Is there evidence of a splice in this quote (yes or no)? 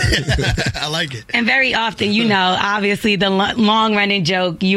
no